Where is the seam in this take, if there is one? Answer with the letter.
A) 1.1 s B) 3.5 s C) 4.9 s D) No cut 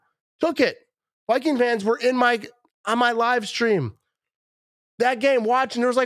D